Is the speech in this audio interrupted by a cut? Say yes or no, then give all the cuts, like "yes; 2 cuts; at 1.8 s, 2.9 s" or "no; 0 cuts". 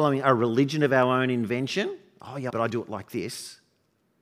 yes; 1 cut; at 2.5 s